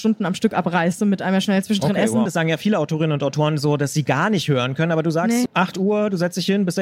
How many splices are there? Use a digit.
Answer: 2